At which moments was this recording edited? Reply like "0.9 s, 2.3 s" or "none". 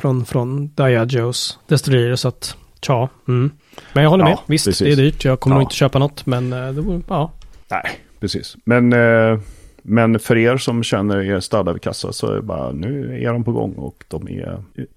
none